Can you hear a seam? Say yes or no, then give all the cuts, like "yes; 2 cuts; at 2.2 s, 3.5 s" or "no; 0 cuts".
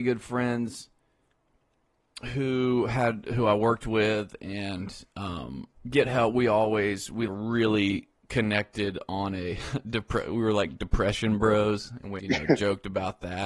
yes; 3 cuts; at 5.7 s, 7.3 s, 12.2 s